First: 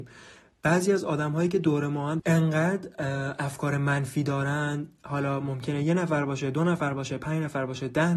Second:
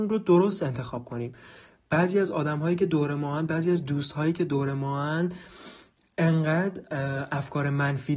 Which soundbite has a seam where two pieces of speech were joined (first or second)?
first